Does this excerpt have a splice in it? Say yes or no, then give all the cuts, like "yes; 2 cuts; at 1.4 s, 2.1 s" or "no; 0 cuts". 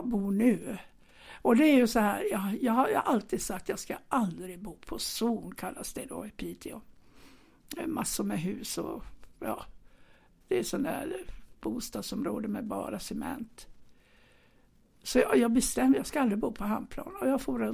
no; 0 cuts